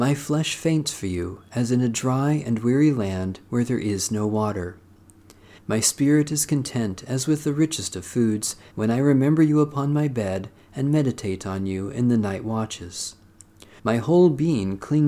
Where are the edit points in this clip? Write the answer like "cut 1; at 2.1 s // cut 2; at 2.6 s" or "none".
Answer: cut 1; at 5.6 s // cut 2; at 8.7 s // cut 3; at 13.8 s